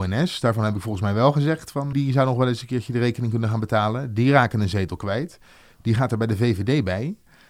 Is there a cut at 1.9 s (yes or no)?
yes